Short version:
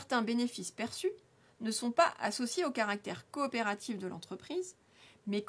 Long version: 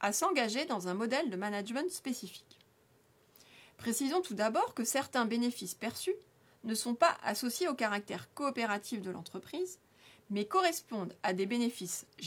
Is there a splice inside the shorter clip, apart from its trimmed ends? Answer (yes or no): no